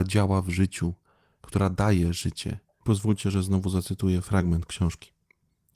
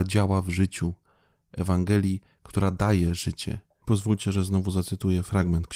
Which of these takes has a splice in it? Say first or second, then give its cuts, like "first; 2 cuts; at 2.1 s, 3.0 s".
first; 1 cut; at 1.4 s